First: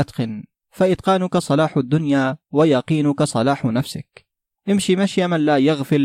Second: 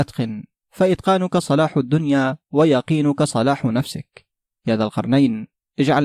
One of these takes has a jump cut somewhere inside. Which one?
first; 1 cut; at 4.5 s

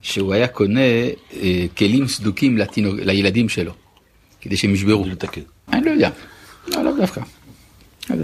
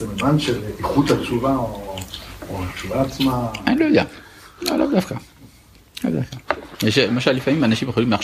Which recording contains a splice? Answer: first; 1 cut; at 5.7 s

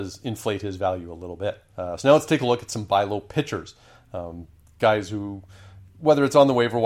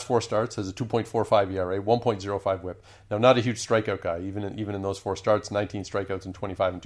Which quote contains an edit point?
first; 2 cuts; at 1.7 s, 5.8 s

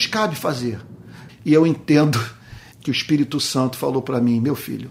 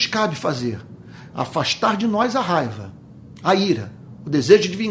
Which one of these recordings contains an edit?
first; 2 cuts; at 1.3 s, 2.7 s

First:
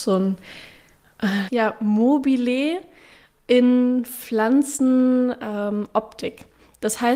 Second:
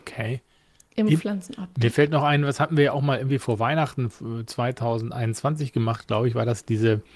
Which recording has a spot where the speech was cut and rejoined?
first; 1 cut; at 1.5 s

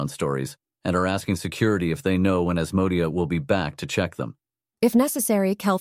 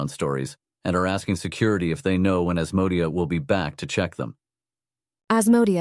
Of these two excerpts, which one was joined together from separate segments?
first; 1 cut; at 4.7 s

